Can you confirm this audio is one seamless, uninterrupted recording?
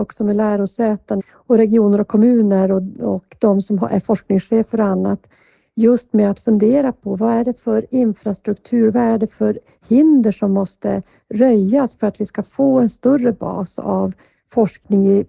no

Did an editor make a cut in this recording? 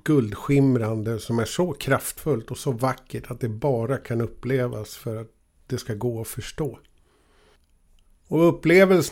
no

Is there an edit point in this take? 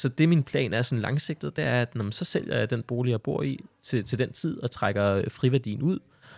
no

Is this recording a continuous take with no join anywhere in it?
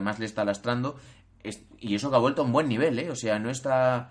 yes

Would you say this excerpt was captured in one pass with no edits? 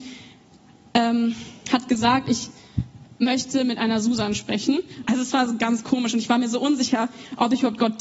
no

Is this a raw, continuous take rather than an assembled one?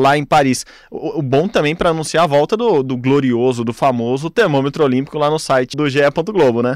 no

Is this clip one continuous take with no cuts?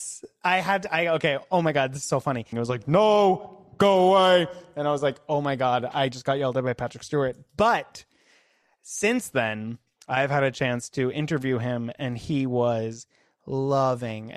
no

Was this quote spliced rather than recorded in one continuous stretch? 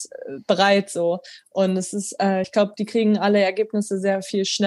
no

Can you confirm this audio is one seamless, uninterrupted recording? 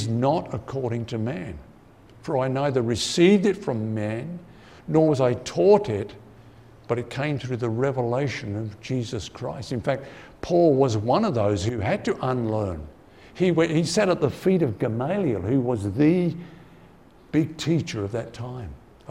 yes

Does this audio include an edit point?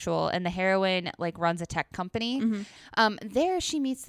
yes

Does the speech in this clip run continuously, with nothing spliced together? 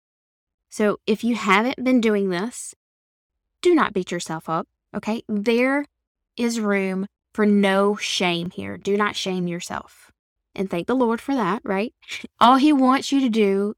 no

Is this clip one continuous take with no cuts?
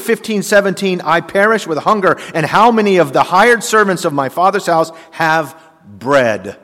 yes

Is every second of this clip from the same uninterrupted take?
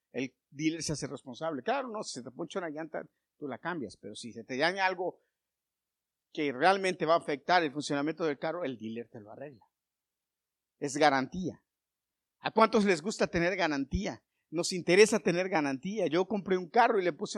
yes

